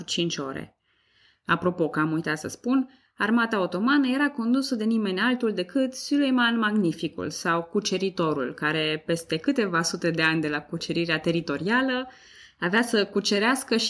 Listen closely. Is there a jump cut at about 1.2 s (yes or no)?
no